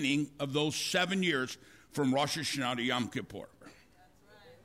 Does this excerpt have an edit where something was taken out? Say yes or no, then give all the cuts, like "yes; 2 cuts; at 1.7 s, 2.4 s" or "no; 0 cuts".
yes; 1 cut; at 3.6 s